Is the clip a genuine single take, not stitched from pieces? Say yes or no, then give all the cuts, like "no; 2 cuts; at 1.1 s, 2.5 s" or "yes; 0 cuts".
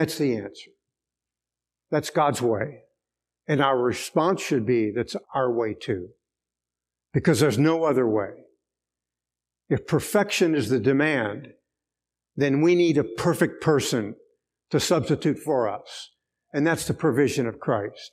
no; 1 cut; at 5.2 s